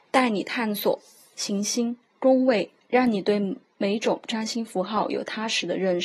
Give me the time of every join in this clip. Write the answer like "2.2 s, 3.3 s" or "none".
2.8 s